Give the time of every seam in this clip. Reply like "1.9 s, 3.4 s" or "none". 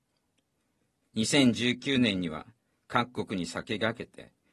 1.0 s